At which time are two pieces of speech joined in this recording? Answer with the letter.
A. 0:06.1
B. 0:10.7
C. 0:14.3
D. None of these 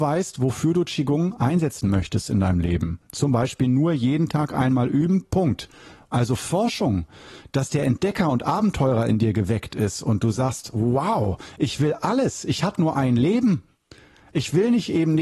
A